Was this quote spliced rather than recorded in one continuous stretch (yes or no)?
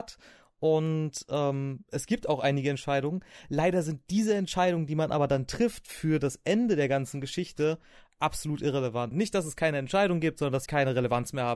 yes